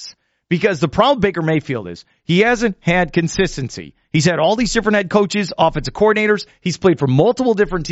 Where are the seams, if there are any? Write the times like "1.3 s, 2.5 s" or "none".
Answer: none

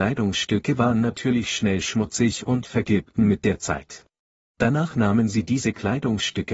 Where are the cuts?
4.5 s

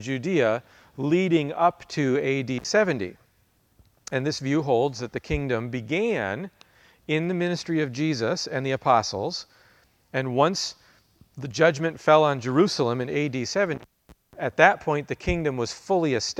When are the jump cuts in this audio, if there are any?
none

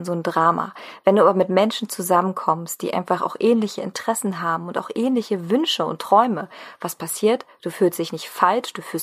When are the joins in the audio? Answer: none

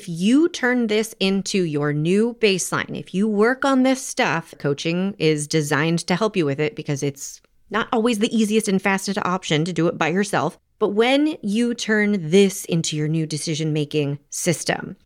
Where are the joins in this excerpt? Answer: 4.5 s

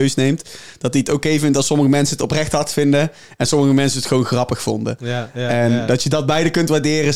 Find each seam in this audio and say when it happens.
none

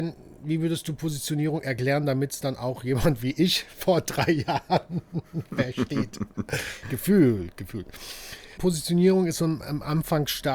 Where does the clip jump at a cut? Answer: 6.8 s, 8.6 s

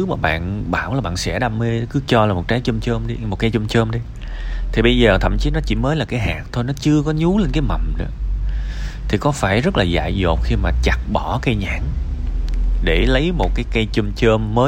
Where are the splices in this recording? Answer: none

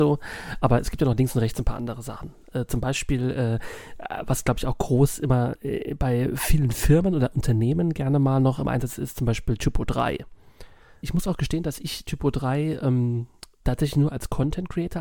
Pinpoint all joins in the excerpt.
11.0 s, 13.6 s

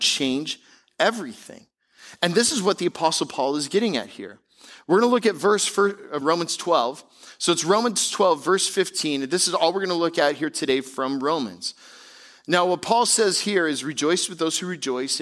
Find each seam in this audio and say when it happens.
6.2 s

